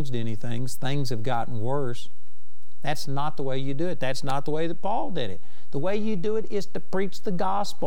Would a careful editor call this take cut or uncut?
uncut